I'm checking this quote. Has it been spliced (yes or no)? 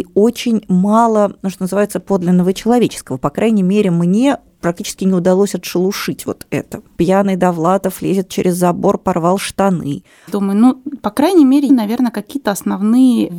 yes